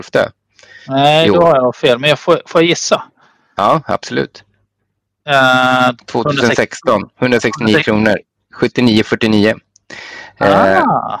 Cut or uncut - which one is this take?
cut